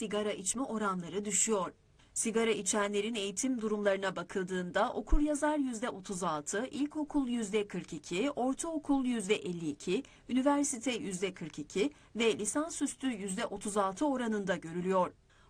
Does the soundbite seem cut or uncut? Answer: cut